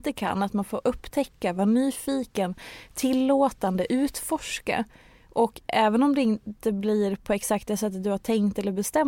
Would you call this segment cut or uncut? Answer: uncut